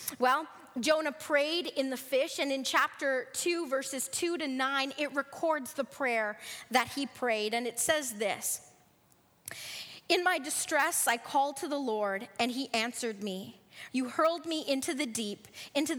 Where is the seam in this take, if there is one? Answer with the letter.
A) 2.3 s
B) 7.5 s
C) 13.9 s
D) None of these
C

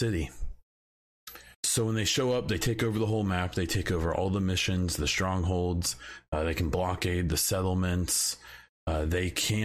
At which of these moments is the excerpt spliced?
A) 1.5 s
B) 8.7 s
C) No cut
A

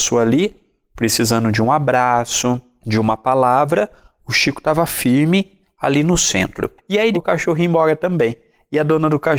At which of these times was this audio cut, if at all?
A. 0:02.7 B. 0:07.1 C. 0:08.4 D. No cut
B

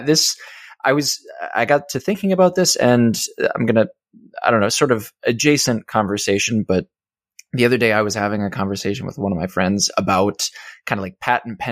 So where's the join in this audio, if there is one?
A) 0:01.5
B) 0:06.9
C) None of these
C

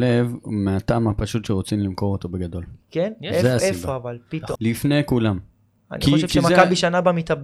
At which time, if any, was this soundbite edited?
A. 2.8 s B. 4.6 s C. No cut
B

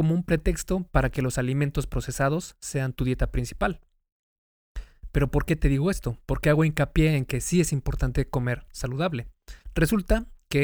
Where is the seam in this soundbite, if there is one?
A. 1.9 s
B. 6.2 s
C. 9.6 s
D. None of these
C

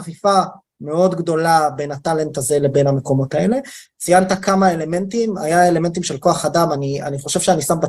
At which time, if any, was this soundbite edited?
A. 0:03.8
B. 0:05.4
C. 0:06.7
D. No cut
A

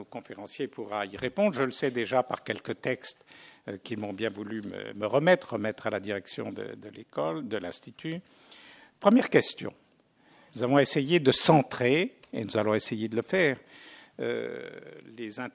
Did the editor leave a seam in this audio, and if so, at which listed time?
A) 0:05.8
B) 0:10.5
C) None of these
B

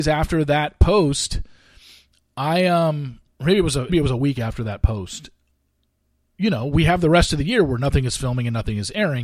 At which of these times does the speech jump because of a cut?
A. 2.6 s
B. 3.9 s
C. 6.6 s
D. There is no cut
B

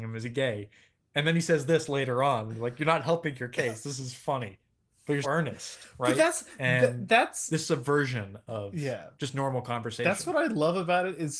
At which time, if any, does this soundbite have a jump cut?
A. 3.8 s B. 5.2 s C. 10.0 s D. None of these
B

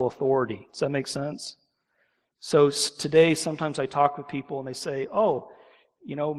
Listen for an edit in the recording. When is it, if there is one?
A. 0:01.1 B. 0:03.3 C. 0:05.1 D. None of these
D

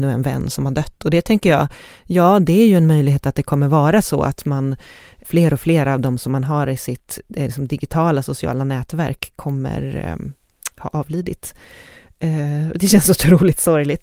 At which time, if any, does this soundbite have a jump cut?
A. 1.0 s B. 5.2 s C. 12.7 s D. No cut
B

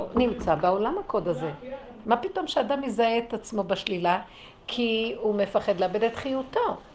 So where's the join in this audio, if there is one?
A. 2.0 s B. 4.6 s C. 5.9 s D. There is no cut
A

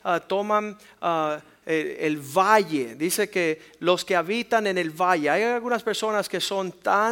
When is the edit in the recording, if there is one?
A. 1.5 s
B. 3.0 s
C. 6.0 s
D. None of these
D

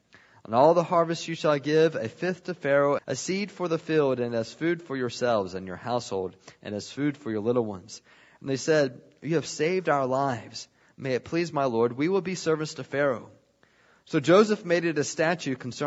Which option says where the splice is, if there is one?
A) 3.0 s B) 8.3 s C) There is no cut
A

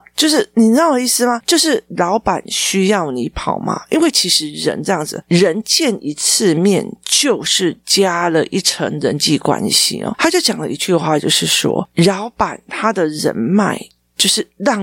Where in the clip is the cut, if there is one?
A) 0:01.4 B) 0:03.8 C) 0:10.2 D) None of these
D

